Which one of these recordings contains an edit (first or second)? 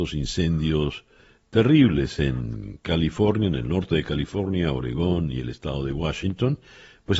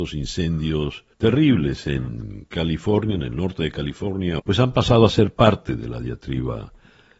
second